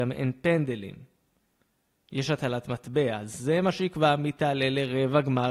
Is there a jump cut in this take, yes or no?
no